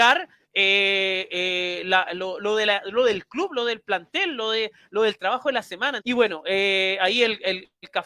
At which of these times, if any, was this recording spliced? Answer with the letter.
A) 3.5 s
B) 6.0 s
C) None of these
B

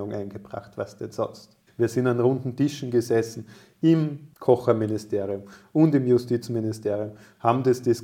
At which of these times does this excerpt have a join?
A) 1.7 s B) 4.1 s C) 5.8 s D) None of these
A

